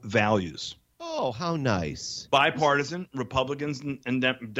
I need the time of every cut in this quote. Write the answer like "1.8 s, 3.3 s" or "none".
none